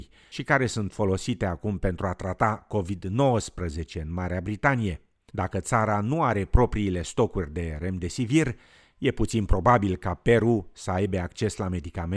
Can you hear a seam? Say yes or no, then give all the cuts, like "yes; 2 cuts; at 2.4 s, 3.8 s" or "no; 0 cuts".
yes; 1 cut; at 5.3 s